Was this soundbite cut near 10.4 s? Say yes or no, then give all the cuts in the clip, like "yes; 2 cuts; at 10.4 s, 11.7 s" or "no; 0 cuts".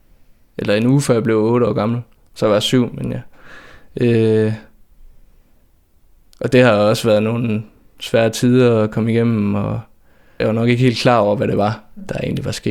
yes; 1 cut; at 10.4 s